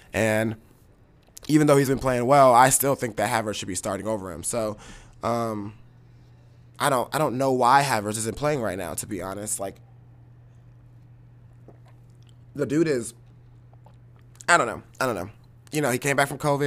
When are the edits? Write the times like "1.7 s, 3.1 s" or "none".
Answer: none